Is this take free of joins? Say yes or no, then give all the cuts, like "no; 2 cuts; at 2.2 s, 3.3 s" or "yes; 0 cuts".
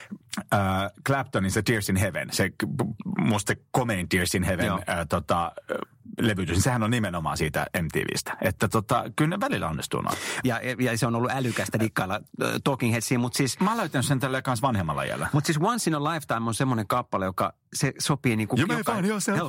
no; 1 cut; at 10.4 s